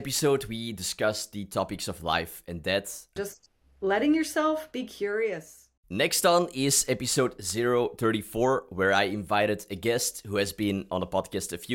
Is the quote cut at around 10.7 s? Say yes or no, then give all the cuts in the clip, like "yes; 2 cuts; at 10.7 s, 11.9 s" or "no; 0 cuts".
no; 2 cuts; at 3.2 s, 5.8 s